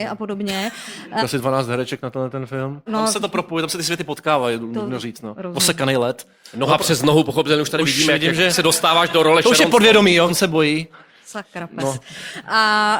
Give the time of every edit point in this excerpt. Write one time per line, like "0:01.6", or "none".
0:01.2
0:02.9
0:10.3